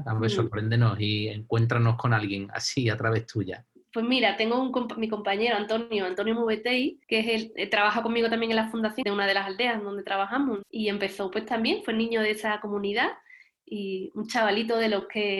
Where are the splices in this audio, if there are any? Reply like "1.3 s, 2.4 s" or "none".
7.0 s, 9.0 s